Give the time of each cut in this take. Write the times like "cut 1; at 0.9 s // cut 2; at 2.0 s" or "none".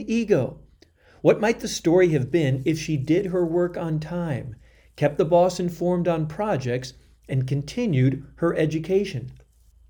none